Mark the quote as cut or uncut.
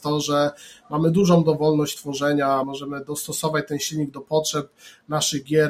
cut